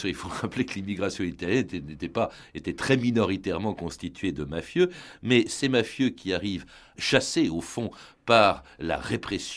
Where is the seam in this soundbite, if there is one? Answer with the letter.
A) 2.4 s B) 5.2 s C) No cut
C